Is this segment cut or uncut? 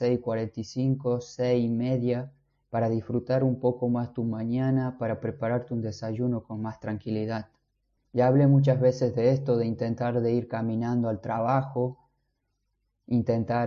cut